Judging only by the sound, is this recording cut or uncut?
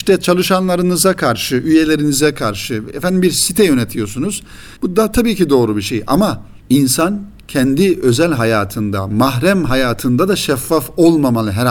cut